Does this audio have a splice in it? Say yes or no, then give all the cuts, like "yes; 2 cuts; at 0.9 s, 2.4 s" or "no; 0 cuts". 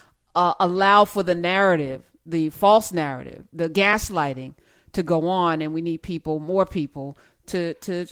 no; 0 cuts